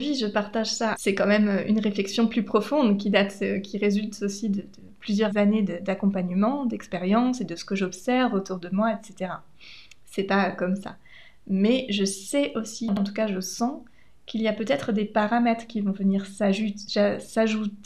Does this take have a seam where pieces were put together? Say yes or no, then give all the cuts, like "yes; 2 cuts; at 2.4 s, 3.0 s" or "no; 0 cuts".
yes; 2 cuts; at 0.9 s, 5.3 s